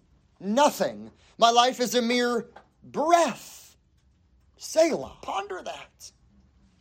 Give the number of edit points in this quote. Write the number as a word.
one